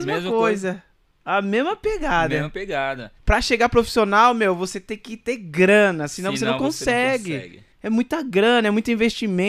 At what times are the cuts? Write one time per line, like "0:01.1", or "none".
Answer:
0:03.2
0:07.7